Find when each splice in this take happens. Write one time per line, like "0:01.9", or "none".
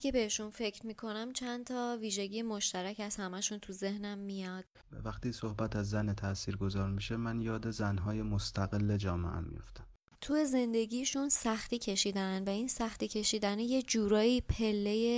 0:04.7
0:10.1

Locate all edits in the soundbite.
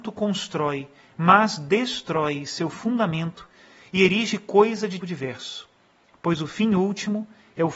0:05.0

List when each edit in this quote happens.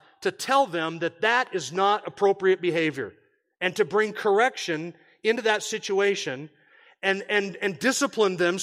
none

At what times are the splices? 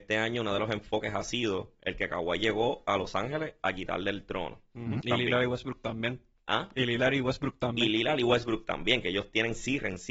0:05.0

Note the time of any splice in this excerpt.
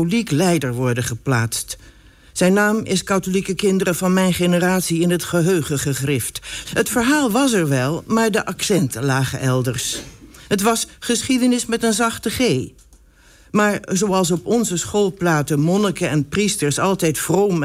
0:06.6

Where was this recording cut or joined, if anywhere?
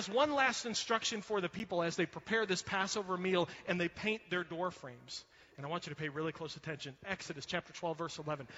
none

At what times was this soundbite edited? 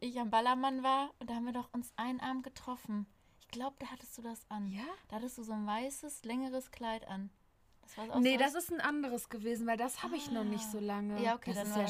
none

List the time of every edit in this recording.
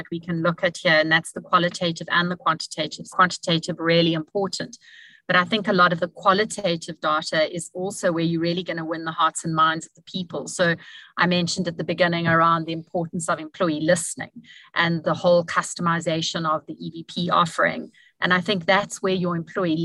0:03.1

